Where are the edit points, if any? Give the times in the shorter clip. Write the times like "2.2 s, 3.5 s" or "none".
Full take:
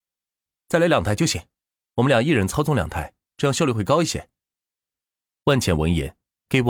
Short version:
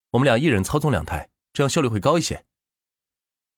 none